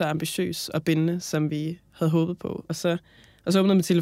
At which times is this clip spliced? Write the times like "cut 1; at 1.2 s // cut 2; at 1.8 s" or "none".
cut 1; at 2.7 s